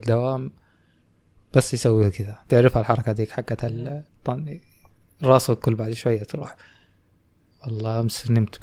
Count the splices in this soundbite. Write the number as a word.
one